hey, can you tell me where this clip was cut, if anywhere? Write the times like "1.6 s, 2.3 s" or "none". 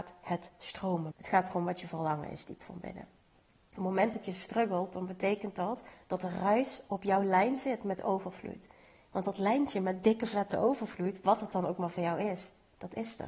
1.1 s